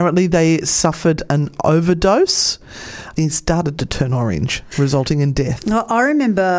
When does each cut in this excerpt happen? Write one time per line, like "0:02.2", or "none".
0:03.2
0:04.7